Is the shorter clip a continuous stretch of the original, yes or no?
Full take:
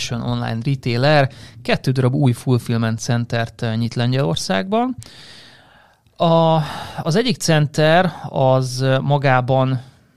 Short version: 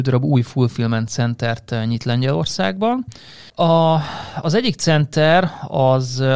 no